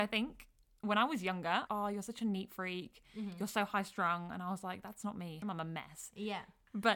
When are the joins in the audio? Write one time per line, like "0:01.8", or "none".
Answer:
0:01.7
0:05.4